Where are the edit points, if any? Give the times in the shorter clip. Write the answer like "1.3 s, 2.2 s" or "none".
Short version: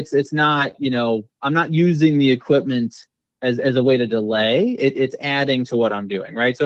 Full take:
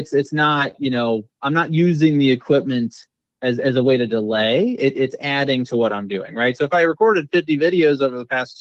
none

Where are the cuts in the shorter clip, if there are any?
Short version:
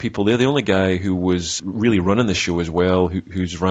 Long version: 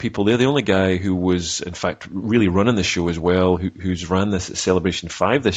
1.6 s

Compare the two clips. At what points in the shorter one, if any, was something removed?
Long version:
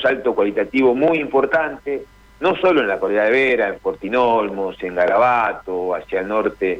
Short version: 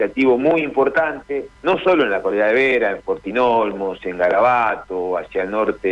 1.6 s

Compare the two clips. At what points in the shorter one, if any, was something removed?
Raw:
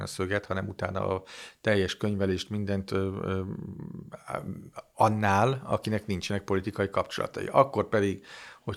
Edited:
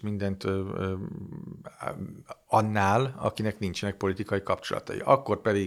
none

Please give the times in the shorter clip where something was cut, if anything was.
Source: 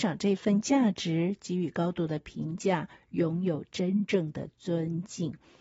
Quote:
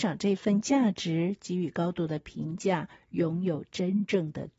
none

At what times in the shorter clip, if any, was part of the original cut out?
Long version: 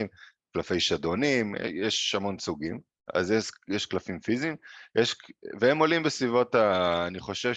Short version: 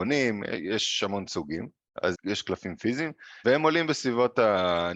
2.1 s, 3.4 s

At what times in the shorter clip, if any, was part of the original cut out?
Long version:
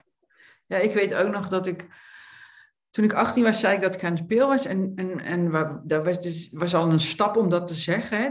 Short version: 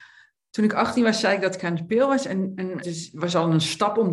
2.8 s

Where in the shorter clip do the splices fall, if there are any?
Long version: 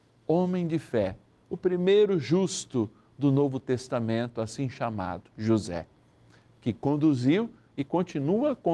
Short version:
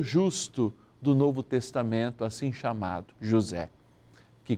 none

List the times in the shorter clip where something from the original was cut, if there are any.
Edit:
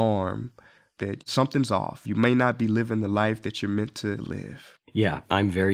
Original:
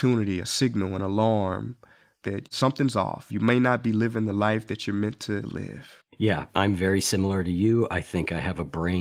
none

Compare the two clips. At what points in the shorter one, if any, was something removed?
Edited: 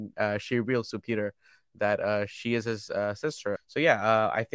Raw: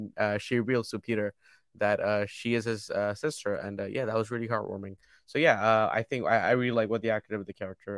3.6 s

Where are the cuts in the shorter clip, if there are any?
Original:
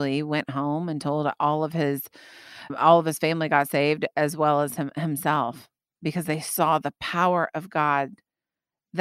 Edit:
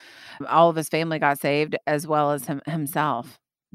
none

